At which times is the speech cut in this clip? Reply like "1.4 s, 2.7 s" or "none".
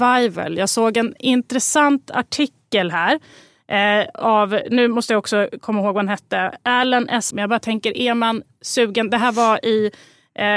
7.3 s